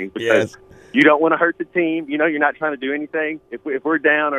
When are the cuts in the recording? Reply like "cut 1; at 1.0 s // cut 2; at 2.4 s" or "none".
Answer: cut 1; at 3.5 s